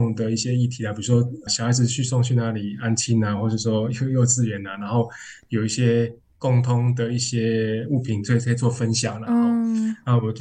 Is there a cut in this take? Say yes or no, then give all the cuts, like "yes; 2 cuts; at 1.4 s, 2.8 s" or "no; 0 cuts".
no; 0 cuts